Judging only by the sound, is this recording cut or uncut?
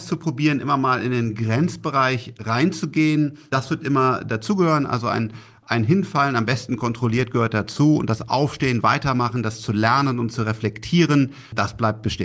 uncut